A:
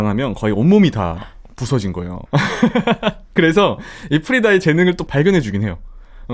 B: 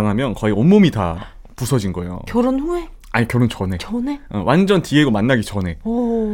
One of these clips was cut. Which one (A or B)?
A